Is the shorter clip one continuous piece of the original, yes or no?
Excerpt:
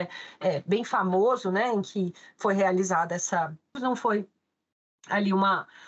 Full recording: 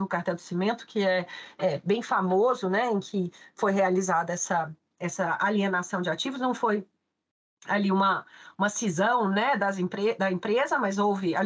no